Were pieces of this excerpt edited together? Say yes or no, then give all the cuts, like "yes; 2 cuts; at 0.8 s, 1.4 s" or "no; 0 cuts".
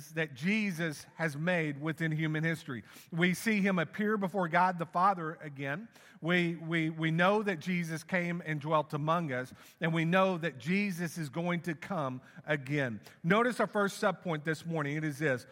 no; 0 cuts